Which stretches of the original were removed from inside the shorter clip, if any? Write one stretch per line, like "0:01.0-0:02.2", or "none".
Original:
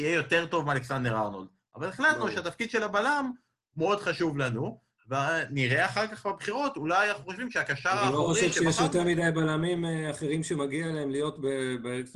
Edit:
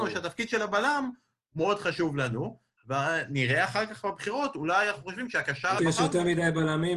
0:08.0-0:08.6